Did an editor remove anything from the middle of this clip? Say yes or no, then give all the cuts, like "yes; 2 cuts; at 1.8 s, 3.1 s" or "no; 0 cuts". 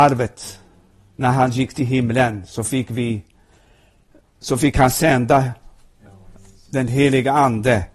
no; 0 cuts